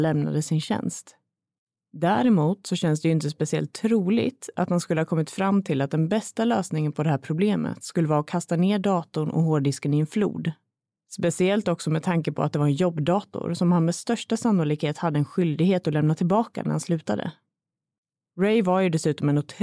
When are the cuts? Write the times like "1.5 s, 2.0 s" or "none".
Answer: none